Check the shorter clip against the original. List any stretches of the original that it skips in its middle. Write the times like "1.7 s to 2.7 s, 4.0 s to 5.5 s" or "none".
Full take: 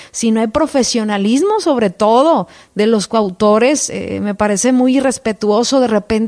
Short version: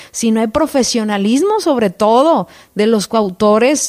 none

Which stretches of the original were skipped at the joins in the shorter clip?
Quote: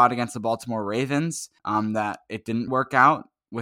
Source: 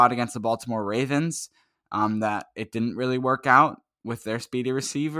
1.6 s to 1.8 s, 2.9 s to 3.2 s

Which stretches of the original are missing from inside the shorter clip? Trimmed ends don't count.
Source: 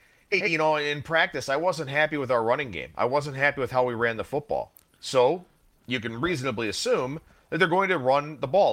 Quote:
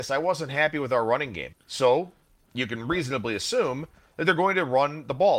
2.9 s to 4.9 s

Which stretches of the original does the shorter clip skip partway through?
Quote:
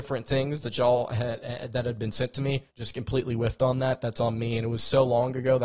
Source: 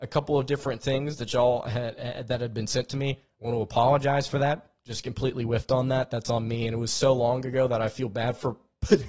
3.3 s to 4.8 s

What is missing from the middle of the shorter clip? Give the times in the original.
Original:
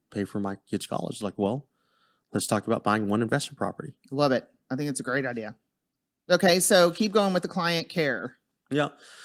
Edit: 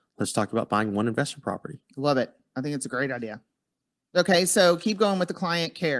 none

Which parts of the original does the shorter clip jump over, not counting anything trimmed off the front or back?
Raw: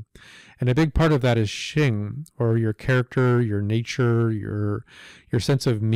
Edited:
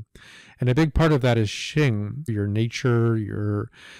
2.3 s to 3.4 s

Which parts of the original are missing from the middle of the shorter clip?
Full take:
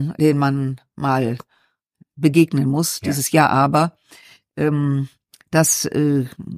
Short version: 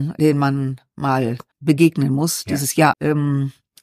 1.5 s to 2.1 s, 3.5 s to 4.5 s

